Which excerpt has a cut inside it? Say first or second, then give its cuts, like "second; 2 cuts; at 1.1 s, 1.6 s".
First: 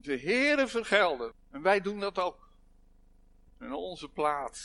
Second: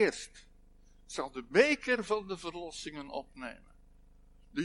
first; 2 cuts; at 1.3 s, 3.5 s